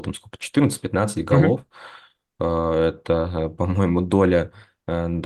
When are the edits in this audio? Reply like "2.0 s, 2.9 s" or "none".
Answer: none